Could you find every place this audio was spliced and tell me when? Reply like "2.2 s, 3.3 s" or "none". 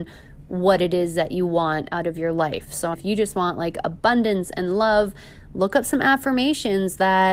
2.9 s